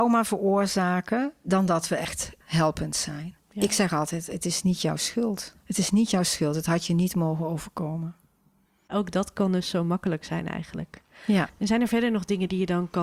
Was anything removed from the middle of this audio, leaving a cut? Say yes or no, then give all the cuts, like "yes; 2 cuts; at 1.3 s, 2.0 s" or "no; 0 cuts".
no; 0 cuts